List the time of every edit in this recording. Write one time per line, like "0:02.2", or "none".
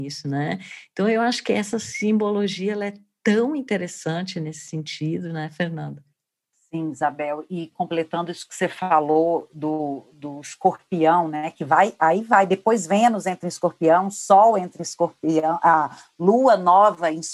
none